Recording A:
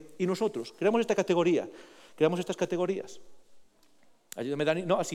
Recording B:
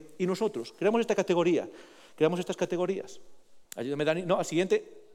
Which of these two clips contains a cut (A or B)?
B